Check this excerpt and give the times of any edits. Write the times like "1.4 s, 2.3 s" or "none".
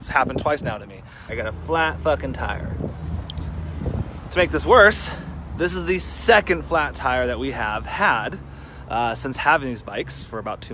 1.3 s